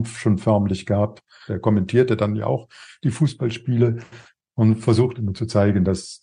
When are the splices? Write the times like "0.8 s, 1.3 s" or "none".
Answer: 1.5 s